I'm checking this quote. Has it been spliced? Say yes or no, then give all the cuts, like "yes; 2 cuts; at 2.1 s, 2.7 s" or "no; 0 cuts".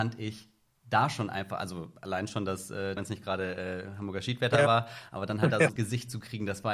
yes; 2 cuts; at 3.0 s, 5.8 s